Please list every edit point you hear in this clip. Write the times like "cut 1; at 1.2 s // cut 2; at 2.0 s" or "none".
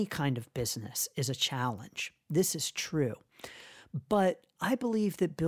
none

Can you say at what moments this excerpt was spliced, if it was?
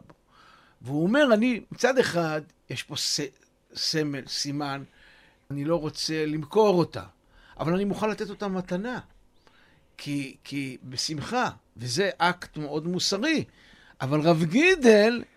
cut 1; at 5.5 s

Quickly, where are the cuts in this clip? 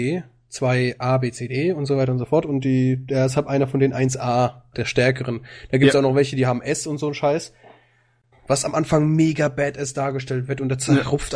cut 1; at 4.7 s // cut 2; at 8.3 s

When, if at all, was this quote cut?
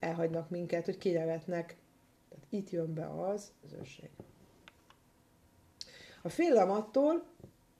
cut 1; at 2.1 s // cut 2; at 3.6 s // cut 3; at 6.2 s

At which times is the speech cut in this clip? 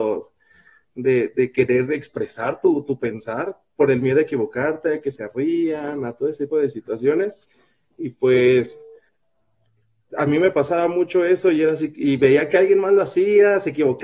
cut 1; at 6.5 s

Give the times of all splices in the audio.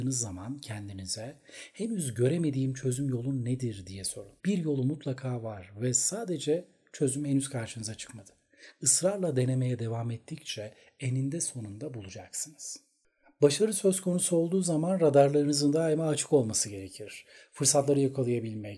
cut 1; at 4.4 s

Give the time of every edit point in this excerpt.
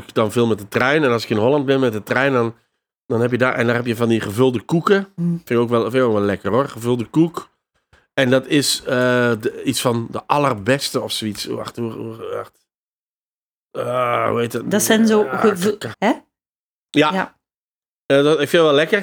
cut 1; at 15.9 s

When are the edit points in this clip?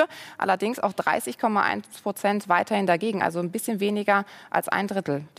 none

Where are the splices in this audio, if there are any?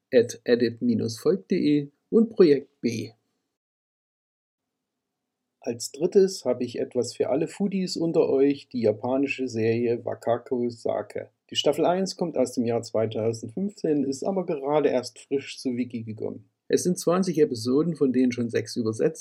cut 1; at 11.4 s // cut 2; at 16.7 s

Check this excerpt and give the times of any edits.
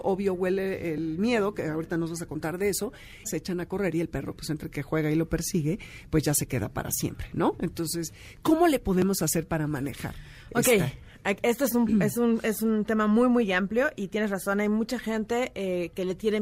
cut 1; at 3.2 s

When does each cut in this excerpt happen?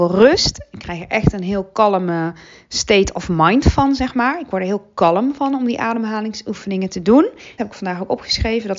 cut 1; at 7.6 s

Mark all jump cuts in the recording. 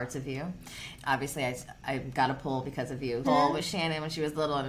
cut 1; at 1.0 s // cut 2; at 3.2 s

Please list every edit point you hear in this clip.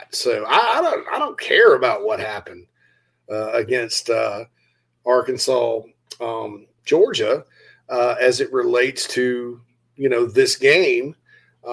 cut 1; at 6.8 s

